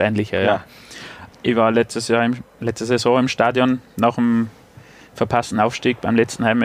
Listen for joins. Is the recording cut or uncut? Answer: cut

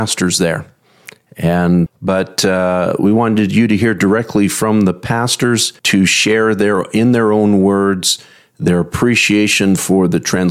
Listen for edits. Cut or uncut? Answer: cut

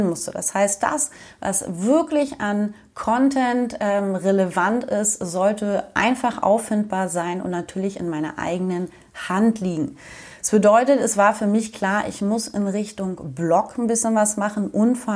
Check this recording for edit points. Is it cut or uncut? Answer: uncut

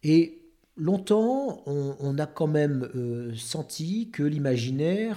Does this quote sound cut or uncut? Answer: uncut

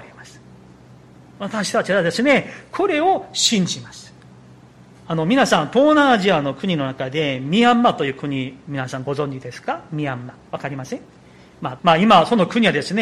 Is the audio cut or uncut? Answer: cut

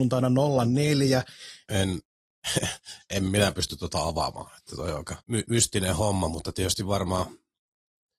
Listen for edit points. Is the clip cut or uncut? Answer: cut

